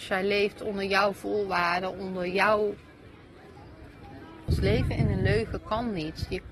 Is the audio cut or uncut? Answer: cut